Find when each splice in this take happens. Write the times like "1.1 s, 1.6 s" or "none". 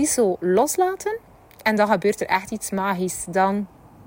none